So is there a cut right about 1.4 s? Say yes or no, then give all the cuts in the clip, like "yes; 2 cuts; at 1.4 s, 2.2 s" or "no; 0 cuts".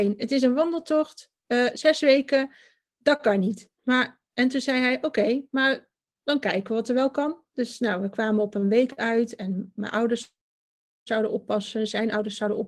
no; 0 cuts